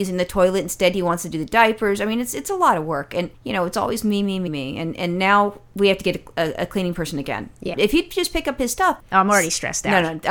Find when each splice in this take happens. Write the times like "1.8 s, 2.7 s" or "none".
4.5 s, 7.7 s, 9.0 s